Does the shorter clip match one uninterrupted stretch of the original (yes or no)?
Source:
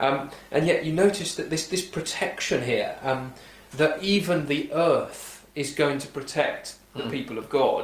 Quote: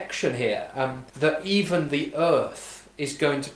no